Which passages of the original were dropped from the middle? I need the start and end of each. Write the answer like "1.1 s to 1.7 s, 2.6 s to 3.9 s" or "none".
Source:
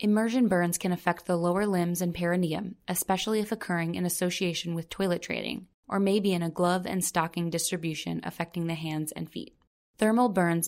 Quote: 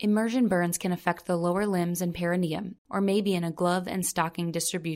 2.8 s to 5.8 s